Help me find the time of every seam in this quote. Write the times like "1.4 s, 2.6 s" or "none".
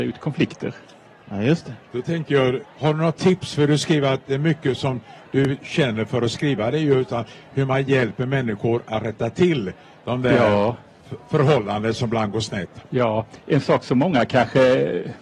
2.6 s